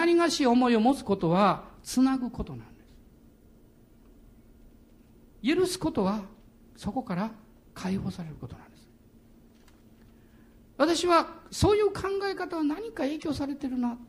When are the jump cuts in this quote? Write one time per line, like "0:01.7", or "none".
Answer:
none